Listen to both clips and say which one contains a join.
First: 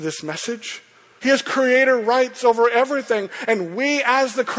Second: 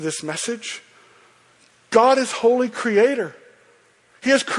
first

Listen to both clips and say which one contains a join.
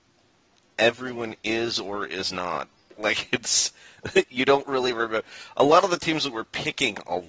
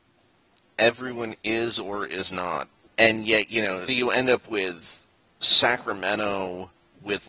second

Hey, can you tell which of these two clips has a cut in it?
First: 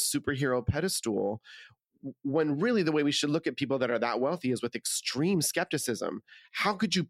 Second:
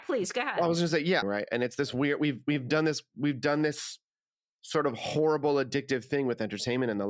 second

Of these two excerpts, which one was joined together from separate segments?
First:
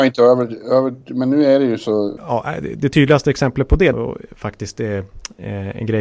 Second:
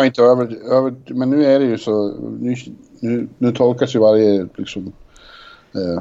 first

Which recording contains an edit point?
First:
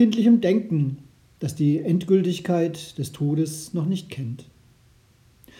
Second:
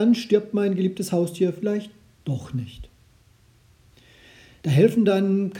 second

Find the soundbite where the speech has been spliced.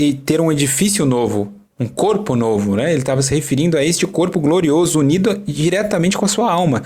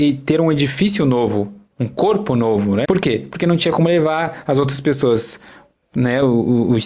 second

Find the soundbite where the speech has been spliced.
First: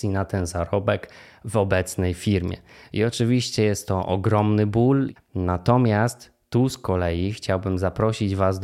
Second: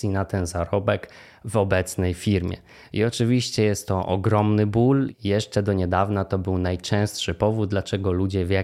first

